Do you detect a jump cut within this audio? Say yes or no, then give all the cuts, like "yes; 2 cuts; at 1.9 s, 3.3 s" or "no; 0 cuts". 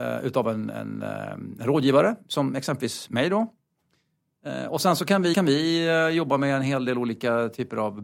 yes; 1 cut; at 5.3 s